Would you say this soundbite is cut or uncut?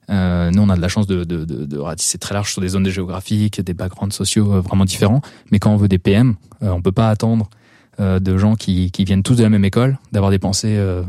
uncut